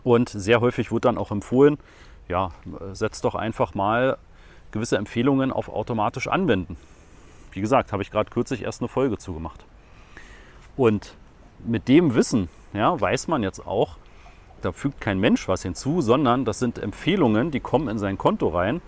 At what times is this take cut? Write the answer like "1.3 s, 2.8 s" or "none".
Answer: 14.6 s